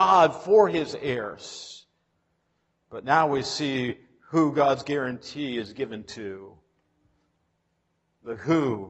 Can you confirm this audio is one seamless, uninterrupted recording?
yes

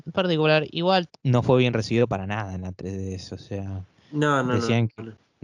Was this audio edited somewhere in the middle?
yes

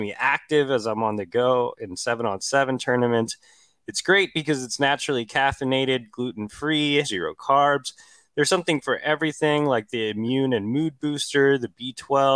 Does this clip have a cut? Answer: yes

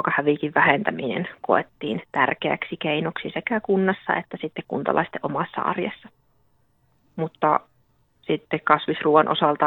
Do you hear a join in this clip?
no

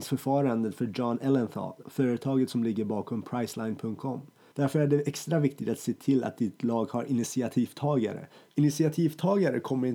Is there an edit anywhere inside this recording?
yes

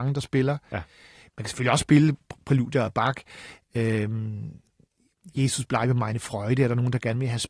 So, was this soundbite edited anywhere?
no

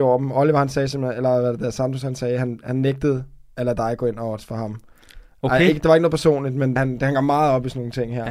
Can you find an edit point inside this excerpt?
yes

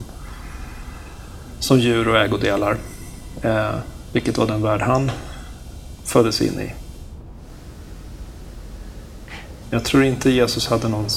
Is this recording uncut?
no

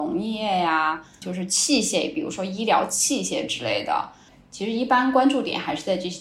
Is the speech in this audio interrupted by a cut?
yes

